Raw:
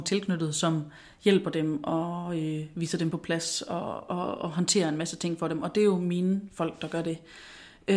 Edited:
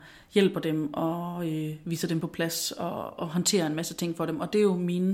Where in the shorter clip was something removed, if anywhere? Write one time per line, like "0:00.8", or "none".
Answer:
0:03.2

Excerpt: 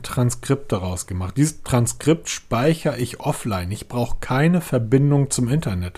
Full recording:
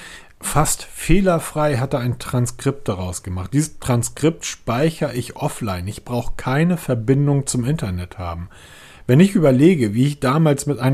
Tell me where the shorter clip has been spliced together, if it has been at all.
none

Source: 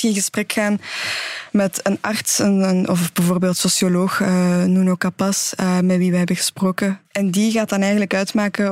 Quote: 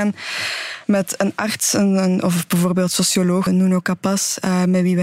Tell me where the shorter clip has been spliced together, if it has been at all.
0:03.5

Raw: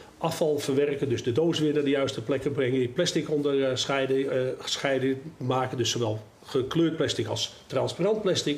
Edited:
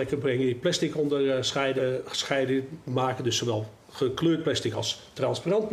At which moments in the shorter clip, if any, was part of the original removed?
0:01.8

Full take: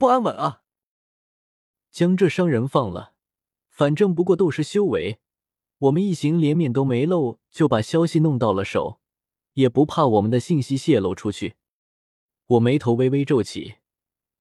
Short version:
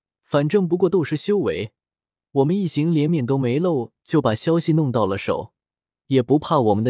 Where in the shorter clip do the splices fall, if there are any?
none

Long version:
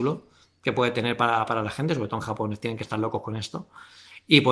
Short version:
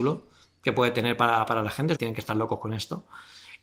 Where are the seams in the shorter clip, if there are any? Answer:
0:01.9

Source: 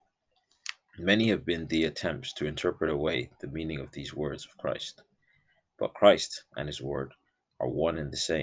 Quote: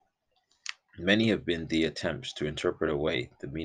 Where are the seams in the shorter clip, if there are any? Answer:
none

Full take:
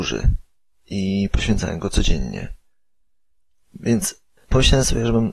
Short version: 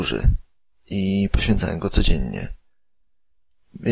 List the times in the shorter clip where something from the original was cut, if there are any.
none

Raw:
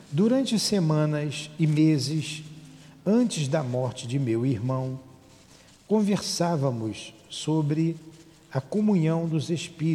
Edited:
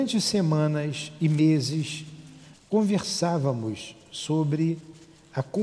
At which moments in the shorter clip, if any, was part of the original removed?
0:02.5

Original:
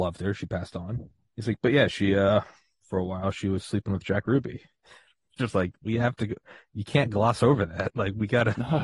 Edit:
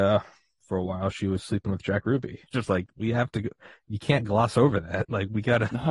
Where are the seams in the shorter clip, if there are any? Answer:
0:02.5

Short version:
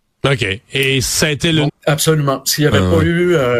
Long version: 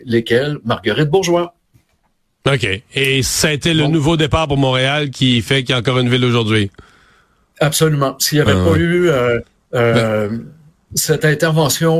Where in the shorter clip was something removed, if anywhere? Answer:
0:01.7

